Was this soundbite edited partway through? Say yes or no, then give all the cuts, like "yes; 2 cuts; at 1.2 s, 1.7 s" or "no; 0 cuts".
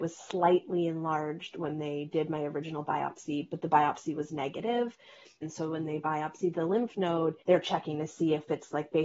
yes; 2 cuts; at 5.4 s, 7.4 s